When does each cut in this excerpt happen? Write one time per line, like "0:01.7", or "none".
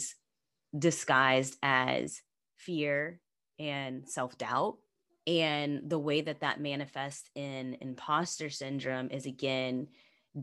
0:05.1